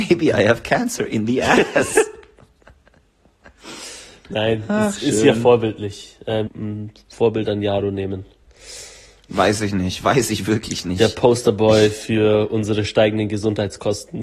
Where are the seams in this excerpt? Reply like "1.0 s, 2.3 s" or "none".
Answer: 6.5 s